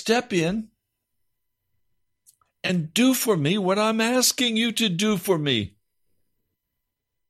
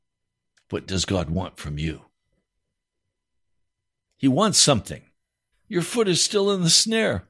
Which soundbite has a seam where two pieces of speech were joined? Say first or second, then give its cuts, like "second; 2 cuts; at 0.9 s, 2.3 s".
second; 1 cut; at 5.5 s